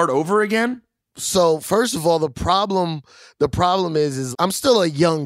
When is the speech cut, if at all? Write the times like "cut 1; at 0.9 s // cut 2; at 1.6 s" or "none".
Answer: cut 1; at 4.3 s